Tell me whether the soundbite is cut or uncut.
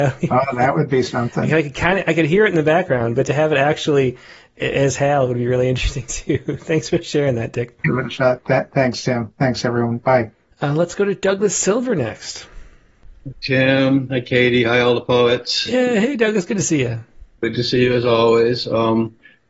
cut